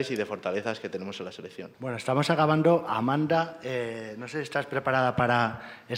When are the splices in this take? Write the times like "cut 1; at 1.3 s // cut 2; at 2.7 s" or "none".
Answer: cut 1; at 1.7 s